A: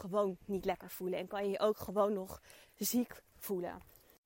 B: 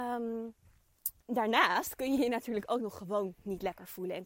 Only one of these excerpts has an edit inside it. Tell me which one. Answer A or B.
B